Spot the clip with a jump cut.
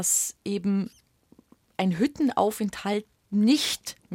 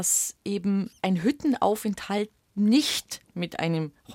second; 1 cut; at 1.0 s

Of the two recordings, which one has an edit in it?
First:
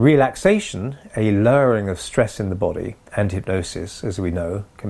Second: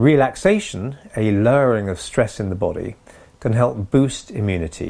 first; 1 cut; at 3.1 s

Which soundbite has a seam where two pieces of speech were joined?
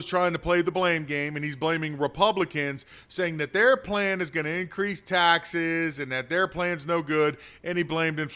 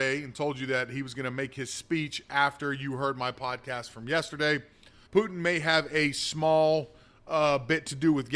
second; 1 cut; at 5.1 s

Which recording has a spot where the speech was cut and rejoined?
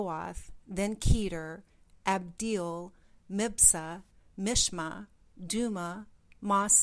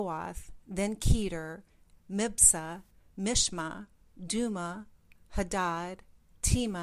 second; 2 cuts; at 2.0 s, 5.2 s

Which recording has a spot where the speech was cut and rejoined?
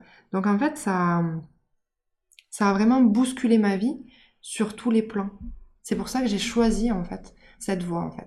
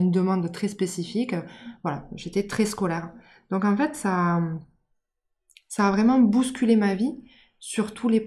first; 1 cut; at 5.8 s

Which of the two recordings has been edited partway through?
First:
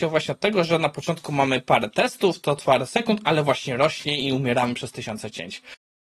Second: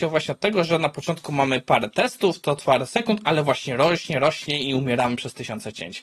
first; 1 cut; at 3.8 s

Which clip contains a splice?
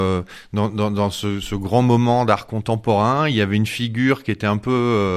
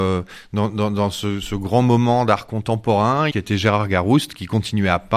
second; 1 cut; at 3.3 s

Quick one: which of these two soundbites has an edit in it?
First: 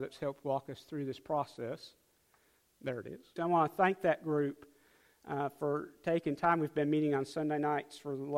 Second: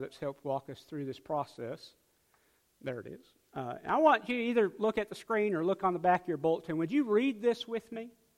first; 1 cut; at 3.4 s

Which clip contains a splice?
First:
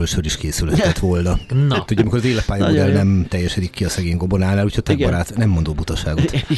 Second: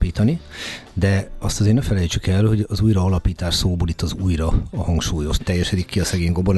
second; 1 cut; at 5.4 s

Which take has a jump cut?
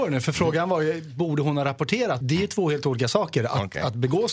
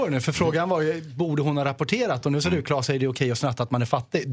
first; 1 cut; at 2.2 s

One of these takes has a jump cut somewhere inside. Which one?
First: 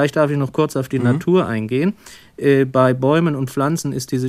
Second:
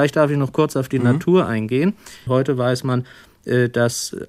second; 1 cut; at 2.3 s

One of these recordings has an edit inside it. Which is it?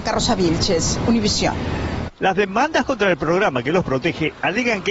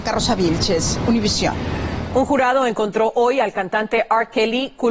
first; 1 cut; at 2.1 s

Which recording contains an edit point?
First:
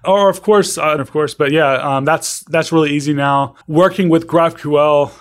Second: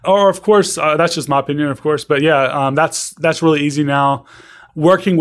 first; 2 cuts; at 1.0 s, 3.6 s

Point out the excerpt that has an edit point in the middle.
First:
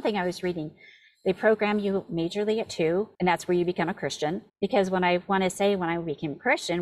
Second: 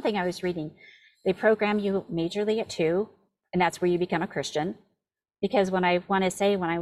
first; 2 cuts; at 3.1 s, 4.5 s

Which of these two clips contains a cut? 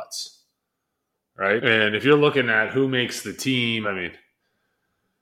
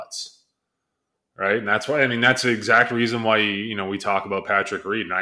first; 2 cuts; at 1.6 s, 3.8 s

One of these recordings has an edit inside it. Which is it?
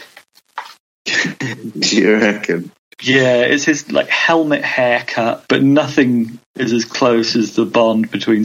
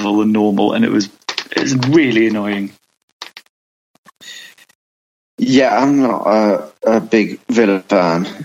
first; 1 cut; at 5.5 s

